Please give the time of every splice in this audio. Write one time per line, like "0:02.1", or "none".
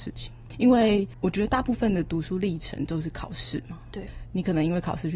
none